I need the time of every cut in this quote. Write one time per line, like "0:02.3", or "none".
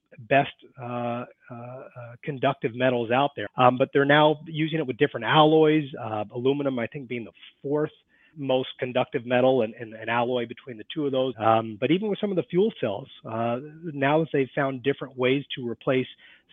0:03.5
0:08.3
0:11.3